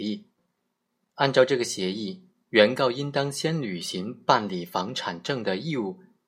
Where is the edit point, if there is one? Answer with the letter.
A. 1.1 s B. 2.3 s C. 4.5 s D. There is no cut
D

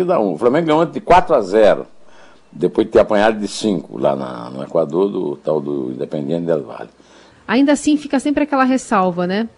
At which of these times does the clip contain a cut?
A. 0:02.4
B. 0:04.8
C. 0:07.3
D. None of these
C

